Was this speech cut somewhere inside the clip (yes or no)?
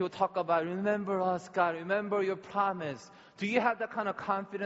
no